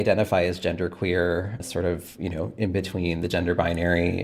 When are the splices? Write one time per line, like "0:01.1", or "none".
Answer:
0:01.6